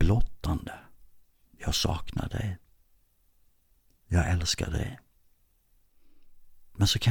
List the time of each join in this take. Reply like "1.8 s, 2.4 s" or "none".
1.4 s